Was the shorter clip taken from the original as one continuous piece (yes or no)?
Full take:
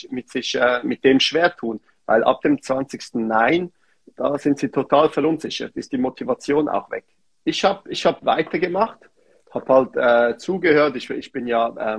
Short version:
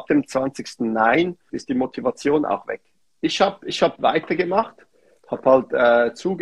no